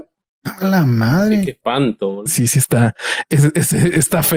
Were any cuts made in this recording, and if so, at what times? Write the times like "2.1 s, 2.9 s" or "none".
2.3 s